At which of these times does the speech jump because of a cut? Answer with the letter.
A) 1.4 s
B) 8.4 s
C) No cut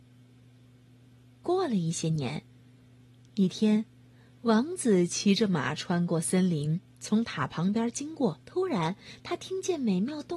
B